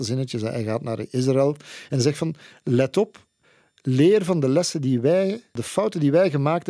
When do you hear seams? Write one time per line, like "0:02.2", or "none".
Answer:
none